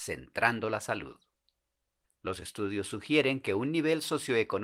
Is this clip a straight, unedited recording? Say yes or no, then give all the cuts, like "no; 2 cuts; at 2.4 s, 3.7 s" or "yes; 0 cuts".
no; 1 cut; at 2.0 s